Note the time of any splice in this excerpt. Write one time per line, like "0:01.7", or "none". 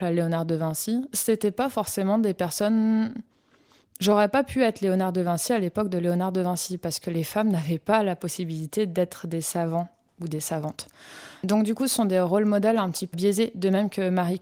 0:13.1